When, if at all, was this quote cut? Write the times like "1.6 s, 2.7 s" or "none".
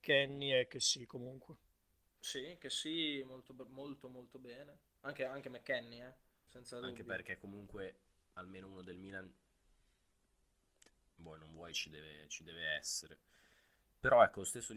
6.5 s